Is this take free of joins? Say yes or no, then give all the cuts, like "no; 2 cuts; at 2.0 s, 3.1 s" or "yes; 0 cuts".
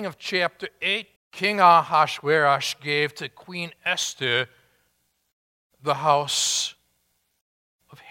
no; 1 cut; at 1.2 s